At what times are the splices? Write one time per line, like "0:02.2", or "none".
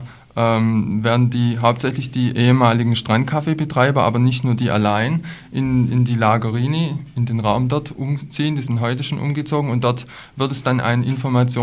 none